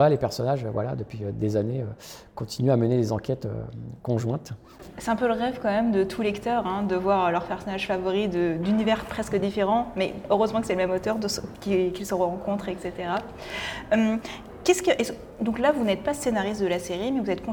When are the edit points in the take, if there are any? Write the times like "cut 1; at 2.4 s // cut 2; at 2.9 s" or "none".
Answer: none